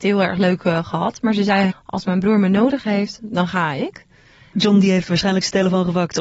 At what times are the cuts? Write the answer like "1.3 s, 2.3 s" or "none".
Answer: 1.7 s, 4.5 s